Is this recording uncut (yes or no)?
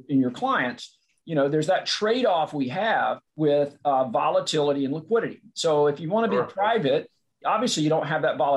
no